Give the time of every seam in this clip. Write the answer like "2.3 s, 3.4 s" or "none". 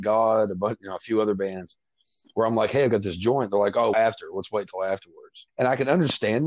3.9 s, 5.5 s